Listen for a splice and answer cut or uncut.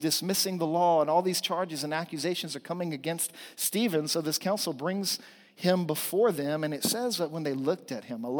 uncut